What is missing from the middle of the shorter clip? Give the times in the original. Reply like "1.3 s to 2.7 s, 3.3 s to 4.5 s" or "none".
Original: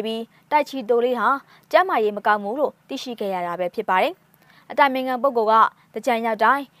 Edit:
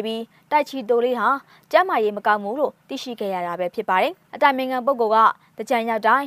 4.3 s to 4.6 s